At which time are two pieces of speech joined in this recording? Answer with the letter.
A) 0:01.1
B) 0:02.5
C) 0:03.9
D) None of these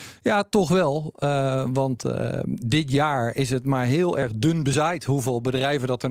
D